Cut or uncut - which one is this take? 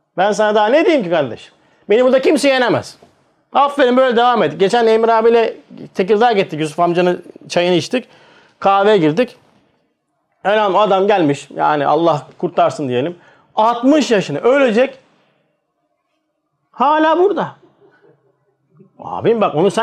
uncut